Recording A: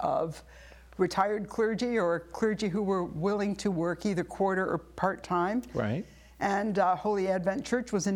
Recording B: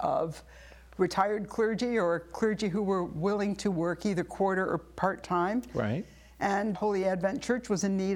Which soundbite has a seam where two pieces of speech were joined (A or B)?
B